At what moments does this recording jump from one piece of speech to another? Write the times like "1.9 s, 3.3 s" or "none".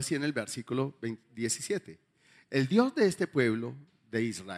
none